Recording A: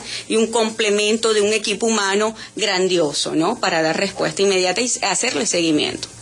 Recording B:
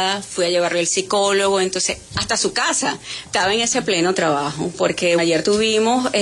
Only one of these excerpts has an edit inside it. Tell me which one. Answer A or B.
B